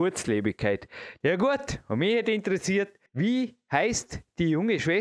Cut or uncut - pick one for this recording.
cut